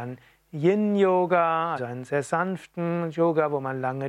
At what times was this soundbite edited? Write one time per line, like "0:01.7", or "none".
0:01.8